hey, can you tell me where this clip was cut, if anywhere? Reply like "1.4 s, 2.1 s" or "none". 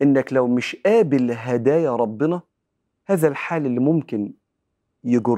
none